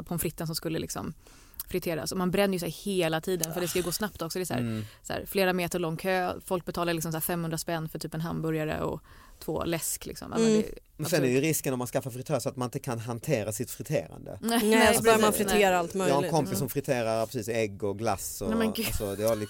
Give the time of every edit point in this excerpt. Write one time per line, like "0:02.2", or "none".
none